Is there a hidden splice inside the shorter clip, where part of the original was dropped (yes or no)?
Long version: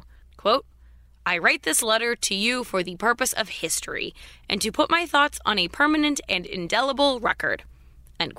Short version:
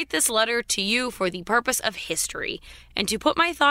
no